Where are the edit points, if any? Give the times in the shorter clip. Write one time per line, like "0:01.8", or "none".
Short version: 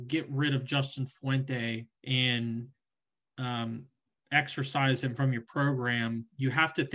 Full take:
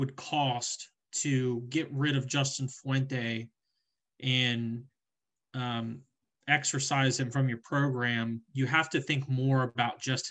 0:01.9